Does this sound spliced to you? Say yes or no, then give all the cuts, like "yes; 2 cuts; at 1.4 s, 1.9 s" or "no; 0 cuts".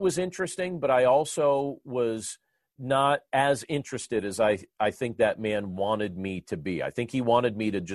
no; 0 cuts